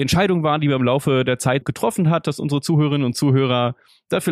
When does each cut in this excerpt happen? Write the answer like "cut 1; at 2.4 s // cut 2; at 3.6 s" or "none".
cut 1; at 1.6 s